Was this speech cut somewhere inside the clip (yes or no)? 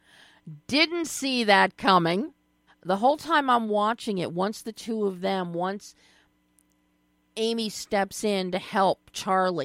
yes